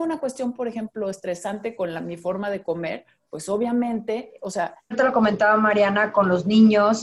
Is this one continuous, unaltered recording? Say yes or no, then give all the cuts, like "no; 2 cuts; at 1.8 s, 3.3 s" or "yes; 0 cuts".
no; 1 cut; at 4.9 s